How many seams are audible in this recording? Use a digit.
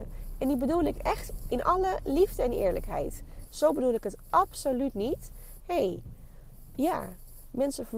2